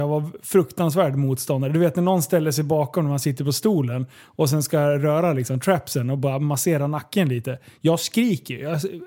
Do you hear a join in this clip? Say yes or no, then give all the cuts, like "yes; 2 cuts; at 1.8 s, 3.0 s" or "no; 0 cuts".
no; 0 cuts